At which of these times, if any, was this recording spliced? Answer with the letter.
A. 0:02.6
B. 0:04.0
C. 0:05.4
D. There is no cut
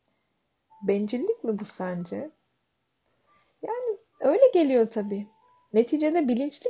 D